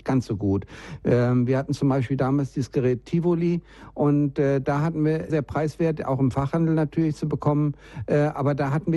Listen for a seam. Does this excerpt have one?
yes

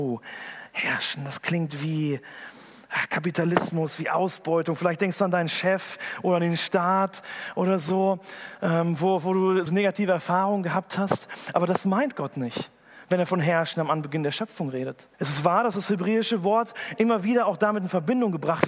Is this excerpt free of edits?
no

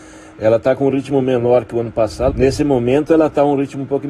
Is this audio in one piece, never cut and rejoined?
no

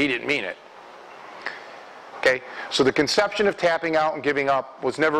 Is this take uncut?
no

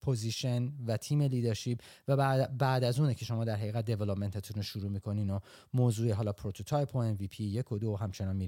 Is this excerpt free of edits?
yes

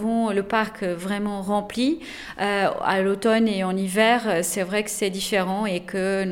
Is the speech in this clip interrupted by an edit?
no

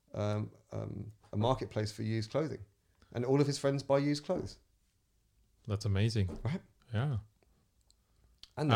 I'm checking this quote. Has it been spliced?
no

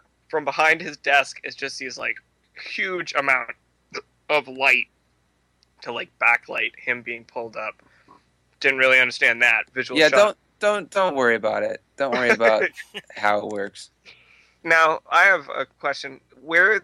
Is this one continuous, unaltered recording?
no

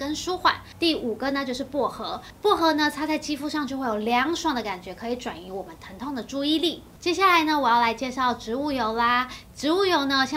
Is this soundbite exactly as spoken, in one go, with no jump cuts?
yes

